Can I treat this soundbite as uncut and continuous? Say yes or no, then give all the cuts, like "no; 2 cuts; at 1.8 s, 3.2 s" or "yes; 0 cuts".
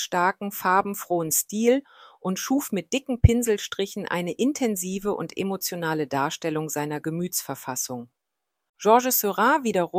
no; 1 cut; at 8.7 s